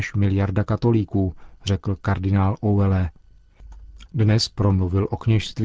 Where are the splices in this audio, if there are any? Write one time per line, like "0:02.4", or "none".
0:04.1